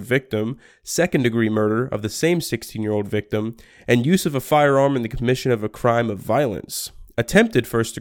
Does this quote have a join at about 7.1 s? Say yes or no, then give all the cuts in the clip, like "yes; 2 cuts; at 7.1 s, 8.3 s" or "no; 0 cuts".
no; 0 cuts